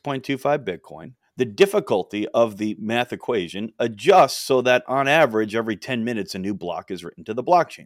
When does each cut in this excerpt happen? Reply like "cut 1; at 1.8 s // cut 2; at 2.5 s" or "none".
none